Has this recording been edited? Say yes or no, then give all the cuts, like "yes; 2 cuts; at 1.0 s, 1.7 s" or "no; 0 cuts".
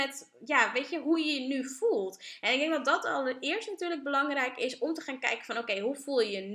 no; 0 cuts